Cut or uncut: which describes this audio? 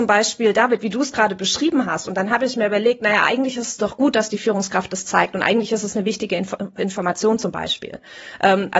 uncut